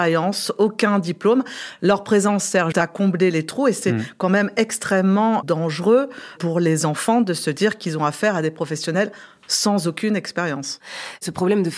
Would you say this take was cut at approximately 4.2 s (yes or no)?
no